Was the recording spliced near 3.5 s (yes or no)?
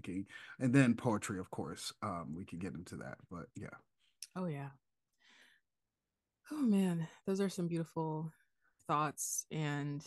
yes